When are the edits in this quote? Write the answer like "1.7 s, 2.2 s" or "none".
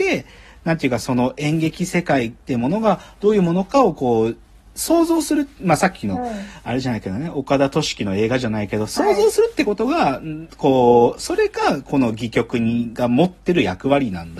none

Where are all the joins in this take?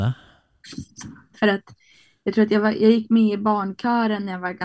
1.3 s

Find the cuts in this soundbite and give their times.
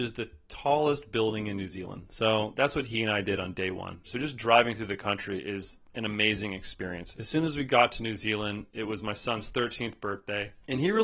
4.1 s, 7.1 s

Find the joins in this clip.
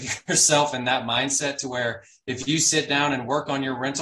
none

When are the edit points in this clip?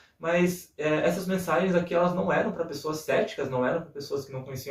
none

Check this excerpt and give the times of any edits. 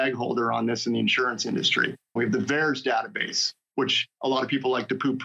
2.2 s

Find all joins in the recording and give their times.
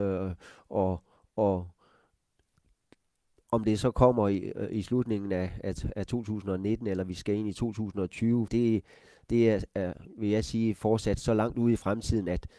8.5 s

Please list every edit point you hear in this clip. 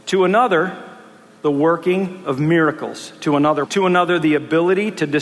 3.7 s

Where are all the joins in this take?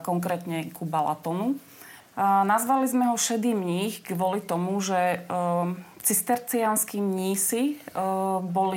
2.0 s

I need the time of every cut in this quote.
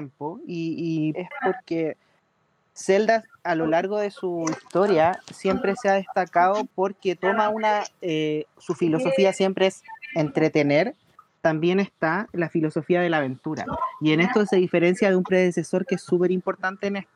1.1 s, 8.5 s

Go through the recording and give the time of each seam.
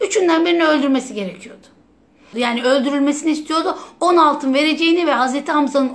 2.3 s

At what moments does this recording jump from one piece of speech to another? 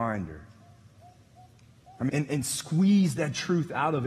2.1 s

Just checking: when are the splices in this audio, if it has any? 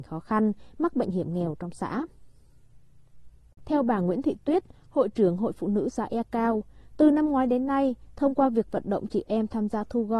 3.6 s

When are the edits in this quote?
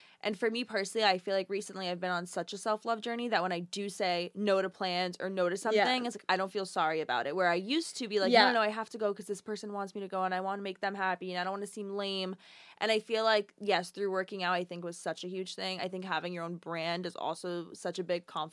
none

